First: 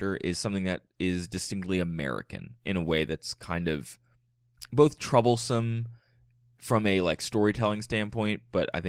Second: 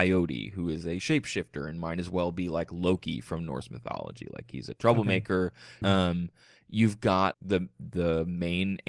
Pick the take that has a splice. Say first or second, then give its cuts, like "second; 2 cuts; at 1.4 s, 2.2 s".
second; 2 cuts; at 5.8 s, 7.3 s